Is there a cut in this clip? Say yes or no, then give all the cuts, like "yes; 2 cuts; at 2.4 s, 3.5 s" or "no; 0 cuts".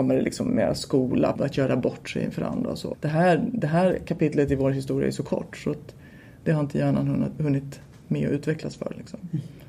yes; 2 cuts; at 1.4 s, 2.9 s